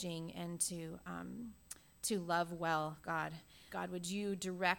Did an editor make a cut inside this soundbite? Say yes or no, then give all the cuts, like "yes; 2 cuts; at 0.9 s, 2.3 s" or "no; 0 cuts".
yes; 1 cut; at 3.7 s